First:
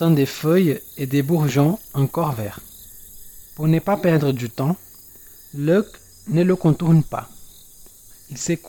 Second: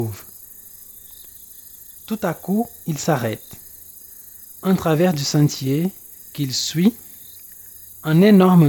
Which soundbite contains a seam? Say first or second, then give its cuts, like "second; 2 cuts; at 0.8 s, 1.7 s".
first; 1 cut; at 3.5 s